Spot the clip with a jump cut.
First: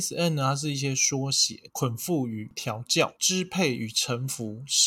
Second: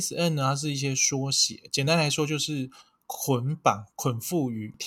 first; 2 cuts; at 1.7 s, 3.2 s

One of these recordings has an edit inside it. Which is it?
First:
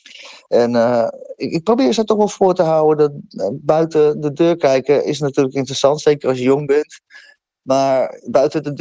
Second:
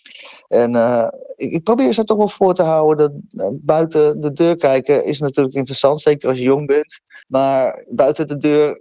second; 1 cut; at 7.2 s

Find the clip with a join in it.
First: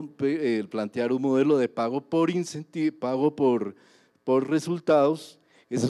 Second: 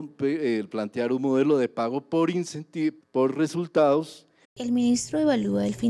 second; 2 cuts; at 3.0 s, 4.4 s

